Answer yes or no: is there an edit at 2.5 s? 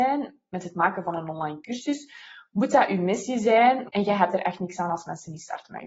no